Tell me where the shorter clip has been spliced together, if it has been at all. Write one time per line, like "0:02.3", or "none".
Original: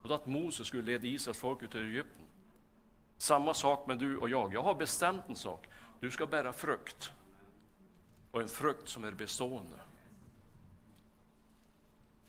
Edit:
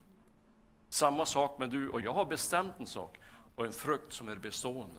0:02.0
0:03.5

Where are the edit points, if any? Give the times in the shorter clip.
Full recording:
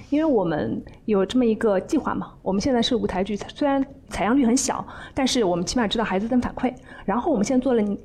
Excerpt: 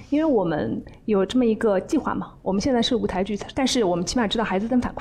0:03.5

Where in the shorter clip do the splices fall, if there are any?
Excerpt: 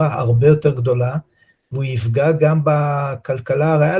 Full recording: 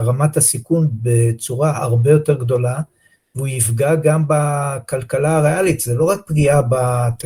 none

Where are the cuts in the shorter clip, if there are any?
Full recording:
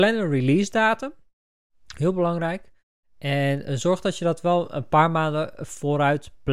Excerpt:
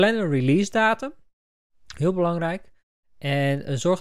none

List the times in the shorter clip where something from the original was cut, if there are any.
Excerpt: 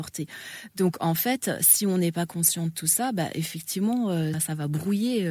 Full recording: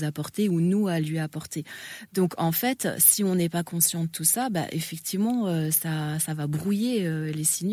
0:04.3

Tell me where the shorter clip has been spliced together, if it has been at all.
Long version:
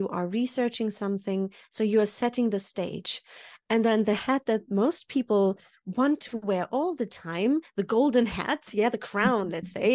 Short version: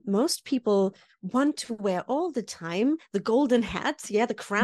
none

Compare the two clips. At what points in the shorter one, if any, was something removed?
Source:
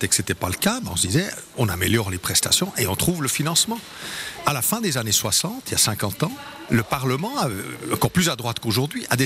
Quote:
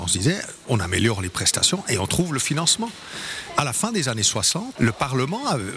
0:04.8

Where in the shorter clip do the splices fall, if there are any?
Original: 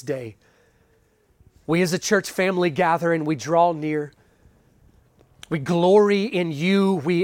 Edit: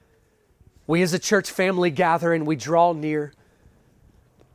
none

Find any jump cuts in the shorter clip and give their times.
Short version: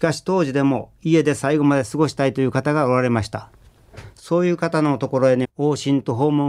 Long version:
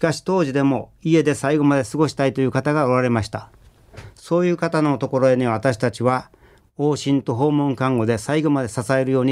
0:05.4

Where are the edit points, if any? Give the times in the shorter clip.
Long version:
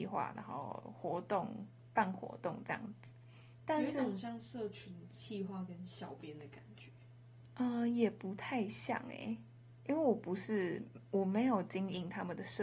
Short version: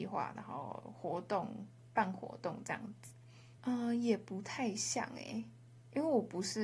0:03.6

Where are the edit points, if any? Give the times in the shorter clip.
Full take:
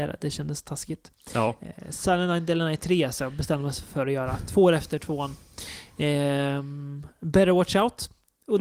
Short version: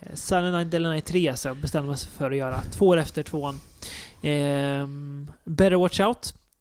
none

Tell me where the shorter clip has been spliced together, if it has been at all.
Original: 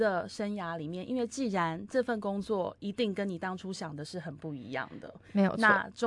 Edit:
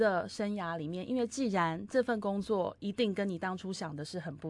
none

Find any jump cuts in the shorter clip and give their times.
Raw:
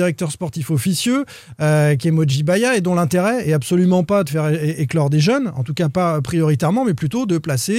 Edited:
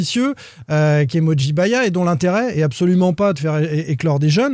none

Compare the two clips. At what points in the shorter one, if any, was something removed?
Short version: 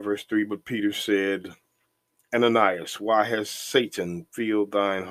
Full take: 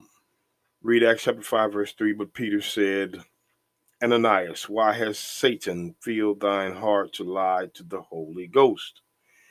none

